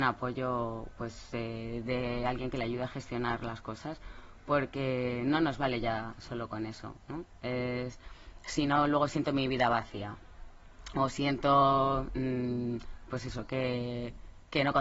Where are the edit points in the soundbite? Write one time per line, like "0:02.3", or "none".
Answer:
none